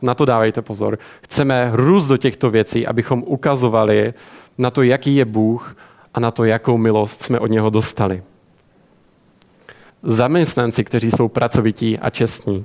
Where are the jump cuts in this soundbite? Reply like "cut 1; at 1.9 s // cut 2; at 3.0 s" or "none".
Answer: cut 1; at 9.9 s